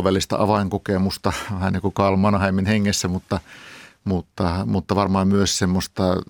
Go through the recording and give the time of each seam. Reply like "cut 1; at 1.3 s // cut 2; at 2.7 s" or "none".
none